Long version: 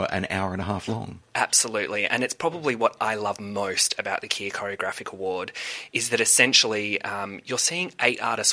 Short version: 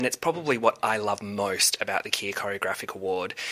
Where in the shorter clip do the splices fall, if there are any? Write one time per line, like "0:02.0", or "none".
none